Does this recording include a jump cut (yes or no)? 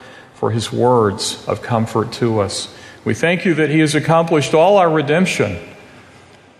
no